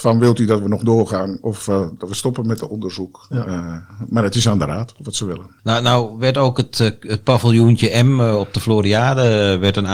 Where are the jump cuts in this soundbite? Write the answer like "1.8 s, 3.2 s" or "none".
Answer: 5.6 s